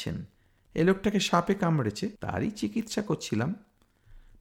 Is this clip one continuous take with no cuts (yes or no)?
no